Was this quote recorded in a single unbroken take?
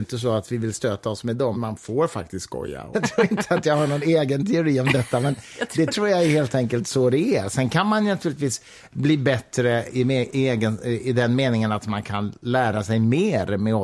no; 2 cuts; at 1.5 s, 2.9 s

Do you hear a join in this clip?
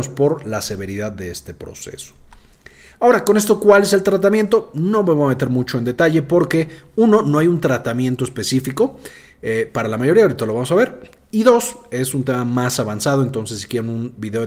no; 0 cuts

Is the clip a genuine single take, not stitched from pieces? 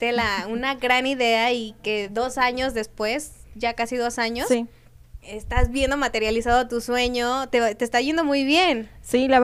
no; 2 cuts; at 5.2 s, 7.5 s

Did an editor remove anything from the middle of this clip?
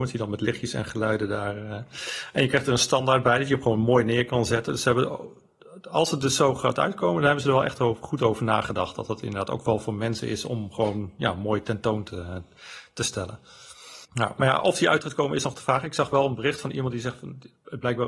yes; 1 cut; at 14.0 s

